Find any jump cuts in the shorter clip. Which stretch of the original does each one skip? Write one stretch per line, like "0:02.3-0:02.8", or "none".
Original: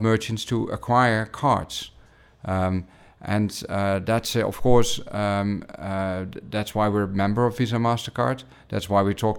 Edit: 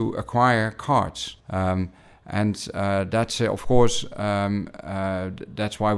0:01.9-0:02.4